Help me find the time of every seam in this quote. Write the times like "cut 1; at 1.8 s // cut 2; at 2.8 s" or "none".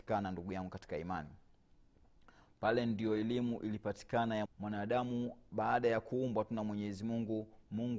cut 1; at 4.4 s